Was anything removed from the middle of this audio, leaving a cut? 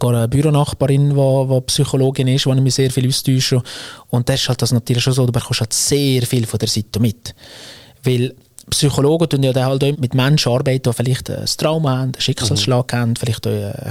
yes; 2 cuts; at 9.9 s, 11.2 s

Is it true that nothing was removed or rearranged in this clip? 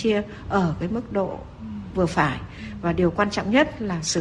yes; 0 cuts

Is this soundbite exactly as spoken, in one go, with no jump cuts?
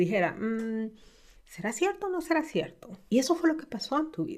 no; 1 cut; at 3.1 s

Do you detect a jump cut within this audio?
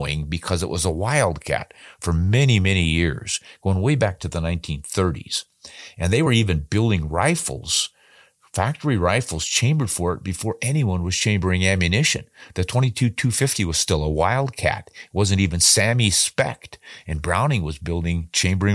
no; 0 cuts

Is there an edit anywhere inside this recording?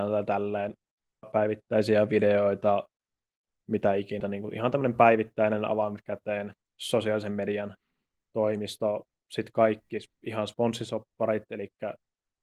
yes; 2 cuts; at 1.2 s, 4.2 s

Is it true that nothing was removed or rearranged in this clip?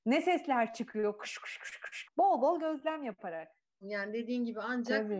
no; 2 cuts; at 2.0 s, 3.8 s

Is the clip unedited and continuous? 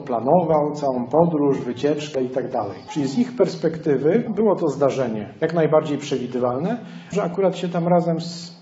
no; 3 cuts; at 2.1 s, 4.3 s, 7.1 s

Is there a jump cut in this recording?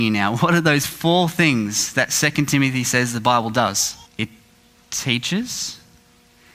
yes; 1 cut; at 4.1 s

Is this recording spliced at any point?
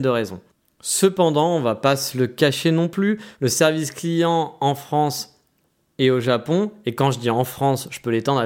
no; 0 cuts

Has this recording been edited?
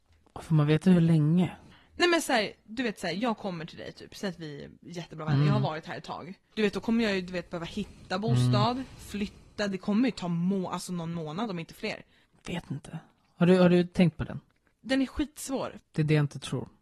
yes; 2 cuts; at 6.5 s, 15.8 s

